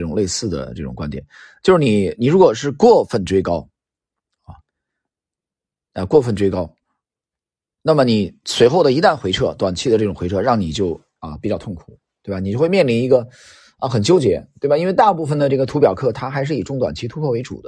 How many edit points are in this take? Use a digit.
0